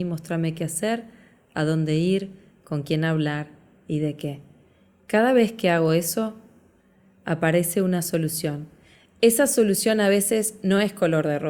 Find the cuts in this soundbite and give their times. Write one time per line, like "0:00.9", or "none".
none